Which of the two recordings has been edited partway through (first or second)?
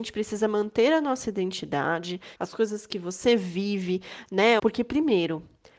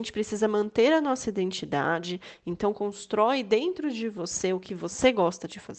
first